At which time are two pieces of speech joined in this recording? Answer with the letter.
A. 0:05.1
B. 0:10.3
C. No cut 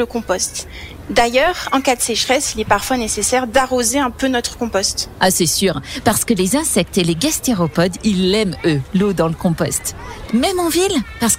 B